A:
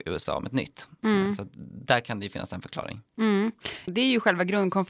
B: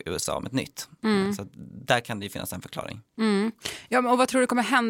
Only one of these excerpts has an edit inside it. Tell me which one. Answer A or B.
A